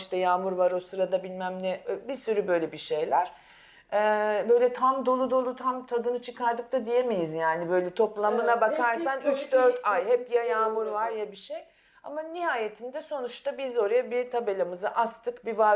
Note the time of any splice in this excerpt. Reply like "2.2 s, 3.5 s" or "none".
none